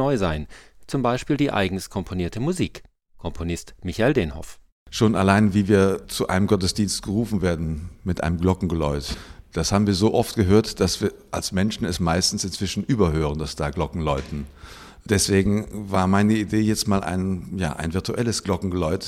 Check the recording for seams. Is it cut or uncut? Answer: uncut